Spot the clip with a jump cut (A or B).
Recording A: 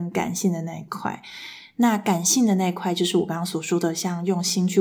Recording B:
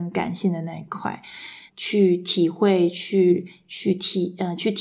B